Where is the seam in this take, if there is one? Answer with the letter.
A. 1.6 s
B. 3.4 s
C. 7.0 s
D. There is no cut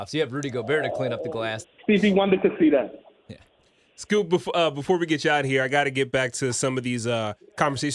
A